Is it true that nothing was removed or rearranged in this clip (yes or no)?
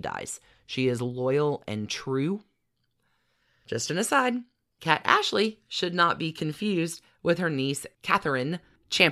yes